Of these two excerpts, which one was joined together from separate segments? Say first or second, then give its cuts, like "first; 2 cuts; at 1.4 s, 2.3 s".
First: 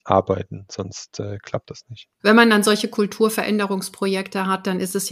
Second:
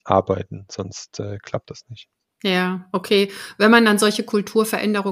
first; 1 cut; at 2.2 s